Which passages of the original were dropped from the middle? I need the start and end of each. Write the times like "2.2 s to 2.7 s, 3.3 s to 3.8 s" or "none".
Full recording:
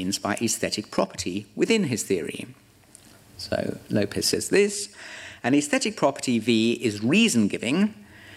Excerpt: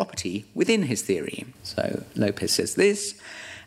2.6 s to 3.3 s